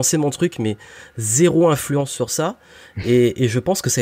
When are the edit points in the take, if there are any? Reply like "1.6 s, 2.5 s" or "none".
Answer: none